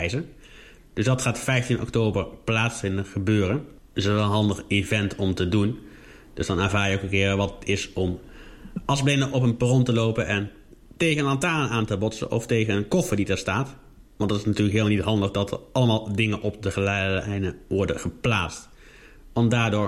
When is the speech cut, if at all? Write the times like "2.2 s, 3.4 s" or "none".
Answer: none